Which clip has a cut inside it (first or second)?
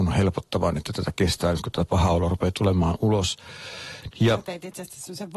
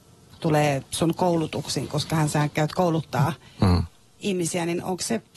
first